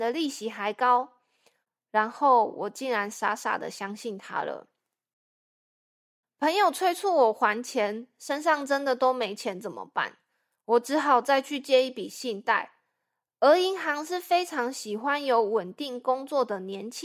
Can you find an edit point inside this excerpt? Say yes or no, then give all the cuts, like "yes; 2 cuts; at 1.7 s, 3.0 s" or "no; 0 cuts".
no; 0 cuts